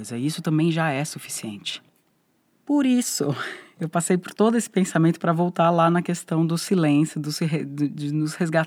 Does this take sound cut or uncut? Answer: cut